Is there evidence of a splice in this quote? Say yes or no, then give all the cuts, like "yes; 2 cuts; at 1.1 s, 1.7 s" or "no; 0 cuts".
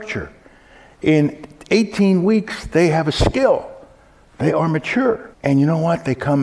yes; 1 cut; at 5.3 s